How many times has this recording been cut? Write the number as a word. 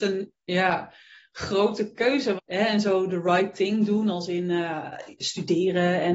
one